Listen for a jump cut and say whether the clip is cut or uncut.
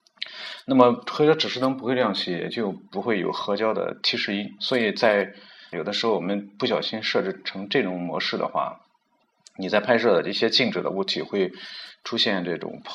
cut